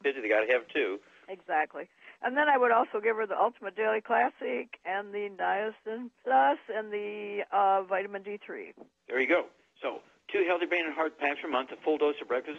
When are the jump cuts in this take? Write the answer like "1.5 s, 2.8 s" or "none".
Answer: none

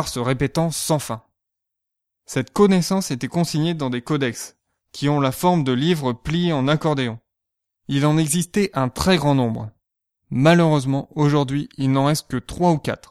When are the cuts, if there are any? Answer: none

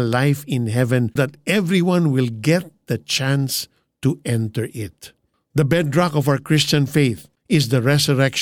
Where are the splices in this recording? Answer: 1.2 s

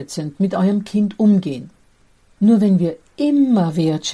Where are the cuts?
2.3 s

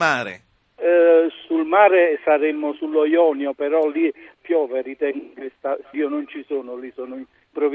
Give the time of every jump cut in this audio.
4.4 s, 5.9 s

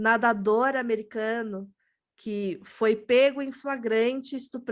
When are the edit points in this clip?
none

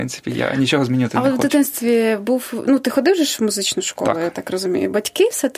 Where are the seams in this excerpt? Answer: none

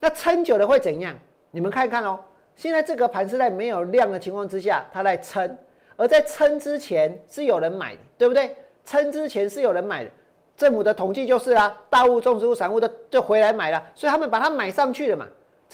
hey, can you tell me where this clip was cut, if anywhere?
none

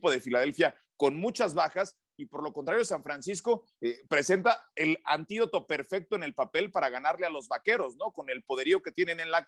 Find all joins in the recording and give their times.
4.1 s

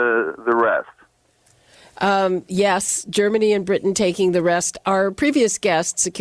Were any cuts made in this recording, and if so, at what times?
none

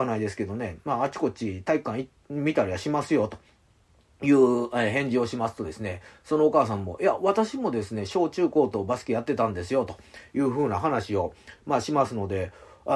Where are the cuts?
none

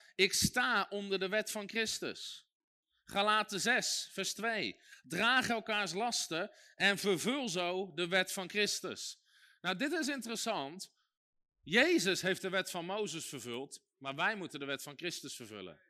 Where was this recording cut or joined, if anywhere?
none

